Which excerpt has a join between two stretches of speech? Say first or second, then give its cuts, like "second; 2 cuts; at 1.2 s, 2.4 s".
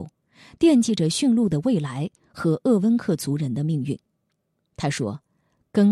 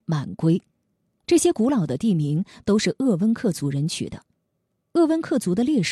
second; 1 cut; at 4.8 s